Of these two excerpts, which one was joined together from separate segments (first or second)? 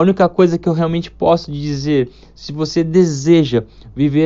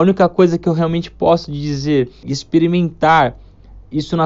second